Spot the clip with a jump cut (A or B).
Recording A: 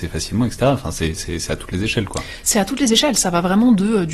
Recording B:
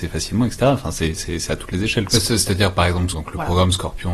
B